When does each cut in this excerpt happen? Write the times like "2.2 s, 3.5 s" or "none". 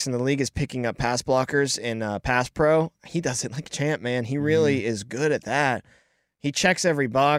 none